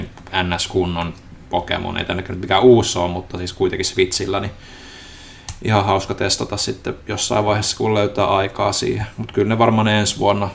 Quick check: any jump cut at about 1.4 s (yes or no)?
yes